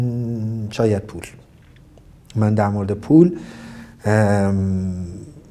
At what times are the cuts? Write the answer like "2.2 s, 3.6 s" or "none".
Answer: none